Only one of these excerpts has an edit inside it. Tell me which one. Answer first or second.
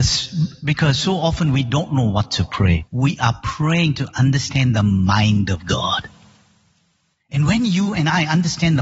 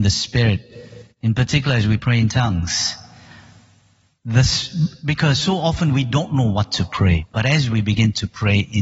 first